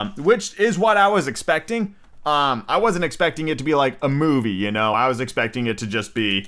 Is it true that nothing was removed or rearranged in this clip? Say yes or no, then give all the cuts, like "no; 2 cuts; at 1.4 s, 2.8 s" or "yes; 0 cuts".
yes; 0 cuts